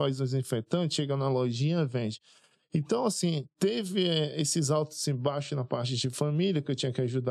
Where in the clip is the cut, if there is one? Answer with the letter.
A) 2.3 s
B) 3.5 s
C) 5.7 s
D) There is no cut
B